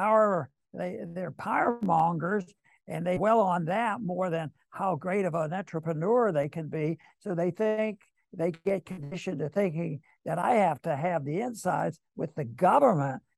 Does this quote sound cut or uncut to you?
uncut